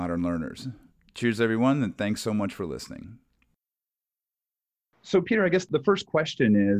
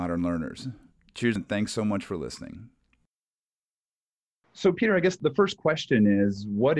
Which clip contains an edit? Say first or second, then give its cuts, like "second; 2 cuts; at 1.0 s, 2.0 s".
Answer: second; 1 cut; at 1.4 s